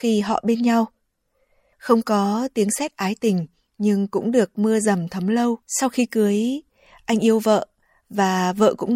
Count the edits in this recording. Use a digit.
2